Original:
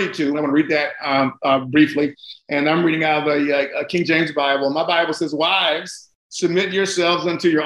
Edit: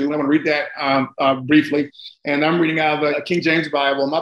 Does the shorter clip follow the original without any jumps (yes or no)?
no